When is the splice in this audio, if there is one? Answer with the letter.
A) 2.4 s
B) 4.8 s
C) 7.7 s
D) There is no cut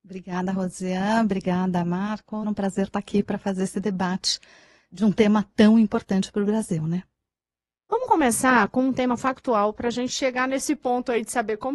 A